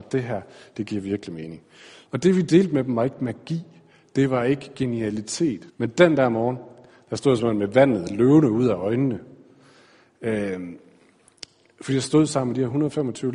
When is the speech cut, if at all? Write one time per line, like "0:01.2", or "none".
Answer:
0:02.1
0:05.7